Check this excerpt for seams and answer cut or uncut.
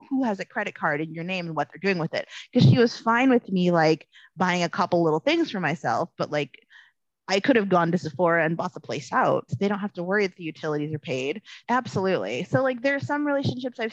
cut